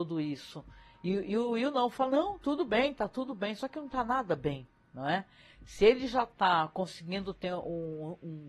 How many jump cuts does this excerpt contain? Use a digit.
0